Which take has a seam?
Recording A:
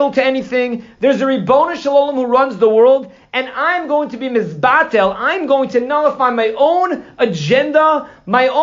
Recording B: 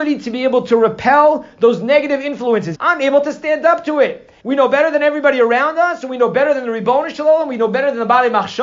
B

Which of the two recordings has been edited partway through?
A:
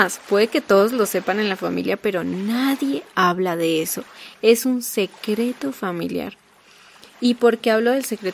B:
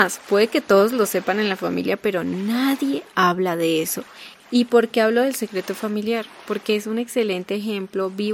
B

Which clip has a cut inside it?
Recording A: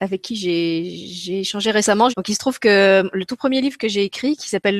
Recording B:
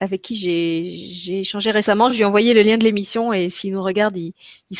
A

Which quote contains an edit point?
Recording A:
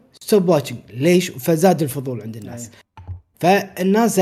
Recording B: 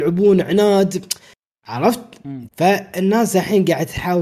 B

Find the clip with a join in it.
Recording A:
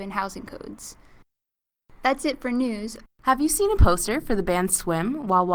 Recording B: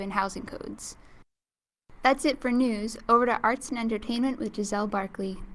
A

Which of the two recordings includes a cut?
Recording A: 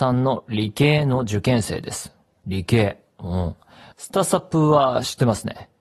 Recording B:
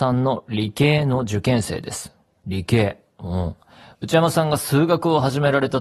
A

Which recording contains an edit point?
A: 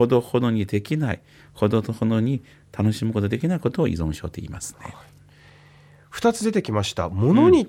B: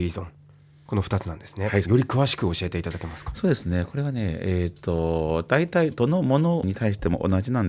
B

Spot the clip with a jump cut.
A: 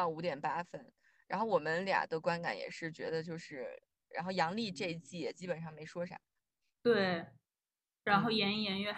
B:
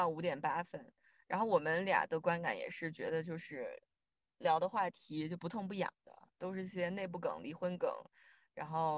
A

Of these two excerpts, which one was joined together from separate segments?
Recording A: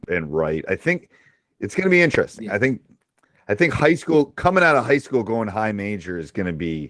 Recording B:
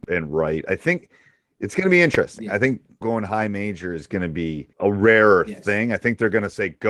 B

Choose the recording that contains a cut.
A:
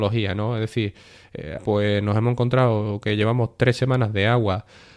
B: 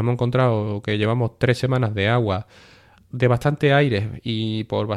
A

